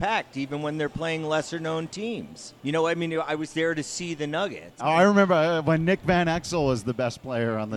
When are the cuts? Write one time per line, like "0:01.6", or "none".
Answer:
0:02.6
0:04.8

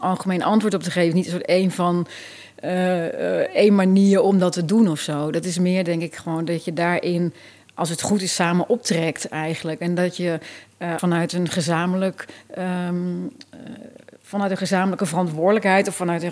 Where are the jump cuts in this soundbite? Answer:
0:11.0

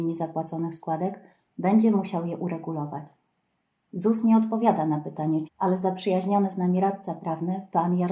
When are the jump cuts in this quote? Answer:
0:05.5

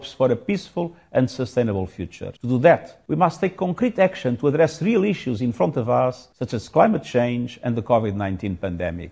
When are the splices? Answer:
0:02.4

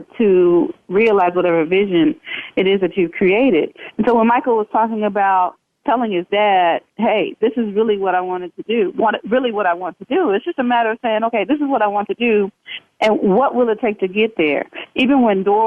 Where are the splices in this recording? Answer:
none

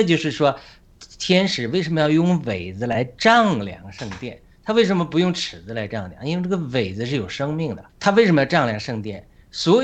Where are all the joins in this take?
0:07.9

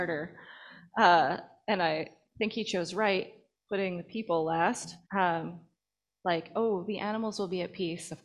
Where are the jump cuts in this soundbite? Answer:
0:05.1

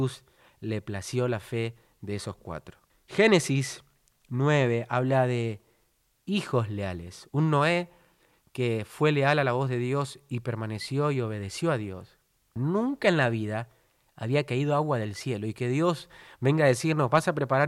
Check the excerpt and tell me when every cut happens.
0:02.9
0:12.6

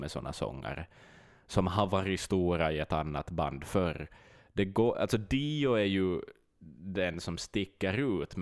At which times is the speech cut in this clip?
none

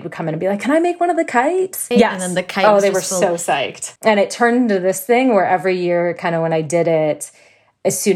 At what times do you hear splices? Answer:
0:01.9
0:04.0

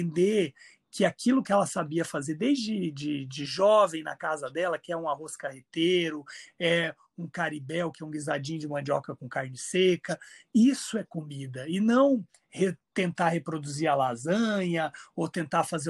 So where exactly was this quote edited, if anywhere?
none

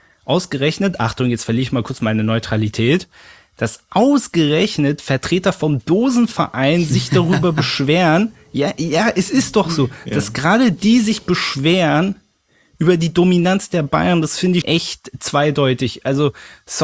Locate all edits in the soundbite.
0:14.6

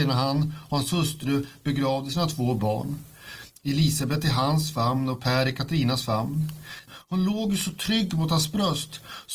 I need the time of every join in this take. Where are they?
0:03.5
0:06.9

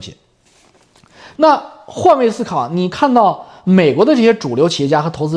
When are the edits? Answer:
0:01.4

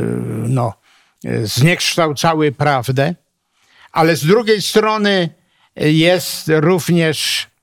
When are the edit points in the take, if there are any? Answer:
none

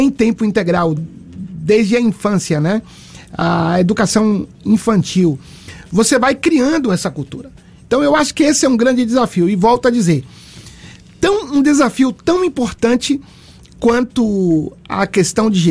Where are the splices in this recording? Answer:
0:01.0

